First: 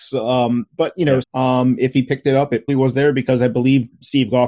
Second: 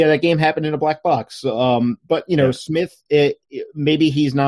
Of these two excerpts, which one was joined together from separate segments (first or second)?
first